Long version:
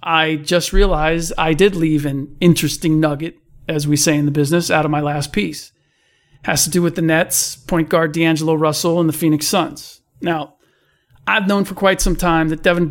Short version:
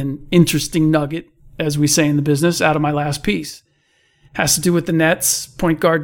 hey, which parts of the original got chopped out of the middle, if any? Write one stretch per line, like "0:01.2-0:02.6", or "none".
none

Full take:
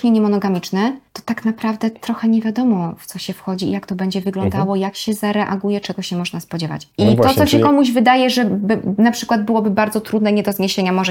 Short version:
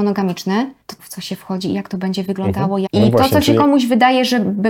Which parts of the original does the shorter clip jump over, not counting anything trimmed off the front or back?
0:01.2-0:03.0
0:04.8-0:06.9

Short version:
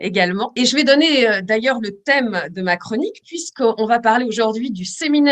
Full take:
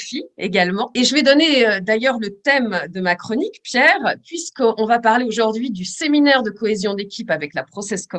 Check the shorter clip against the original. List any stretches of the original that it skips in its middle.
0:03.6-0:04.2

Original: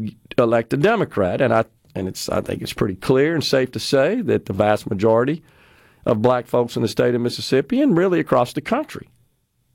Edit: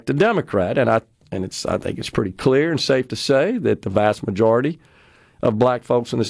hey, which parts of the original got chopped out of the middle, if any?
none

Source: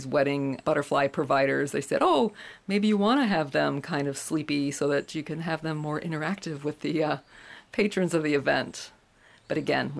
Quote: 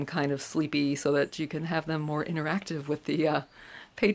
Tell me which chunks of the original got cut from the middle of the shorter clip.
none

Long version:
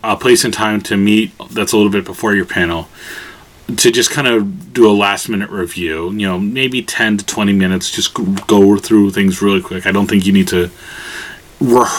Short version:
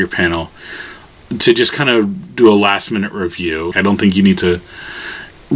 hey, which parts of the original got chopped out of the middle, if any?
0:06.1-0:09.8

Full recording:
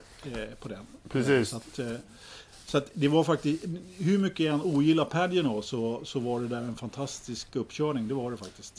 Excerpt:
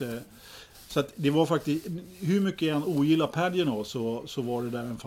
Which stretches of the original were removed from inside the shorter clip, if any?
none

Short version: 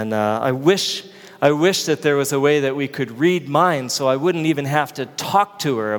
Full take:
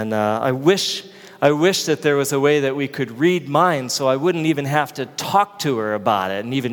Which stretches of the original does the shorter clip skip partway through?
none

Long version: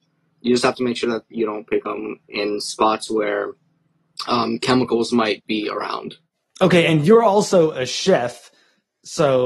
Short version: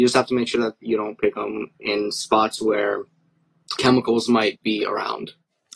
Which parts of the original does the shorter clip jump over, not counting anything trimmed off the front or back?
0:04.2-0:04.6

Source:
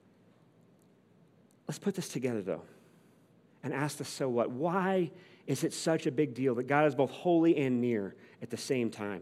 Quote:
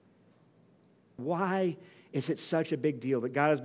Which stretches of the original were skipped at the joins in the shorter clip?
0:01.2-0:04.5

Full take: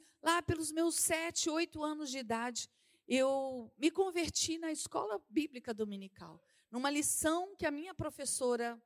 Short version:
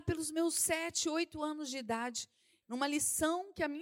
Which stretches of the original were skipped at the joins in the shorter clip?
0:03.0-0:06.7

